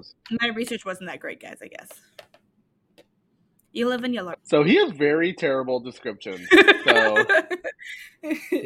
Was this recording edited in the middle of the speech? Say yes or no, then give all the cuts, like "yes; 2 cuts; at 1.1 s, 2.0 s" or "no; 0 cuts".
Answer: yes; 1 cut; at 4.3 s